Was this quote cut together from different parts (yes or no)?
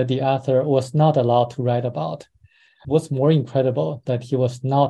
yes